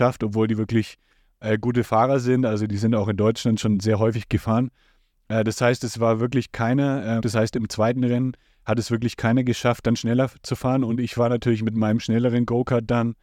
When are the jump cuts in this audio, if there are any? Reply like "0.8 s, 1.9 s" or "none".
7.2 s